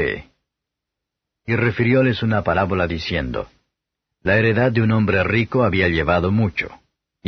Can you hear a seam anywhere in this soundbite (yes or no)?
no